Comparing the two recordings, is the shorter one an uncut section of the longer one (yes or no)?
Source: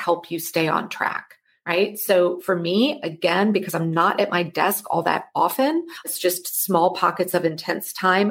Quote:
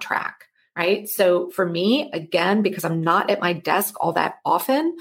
yes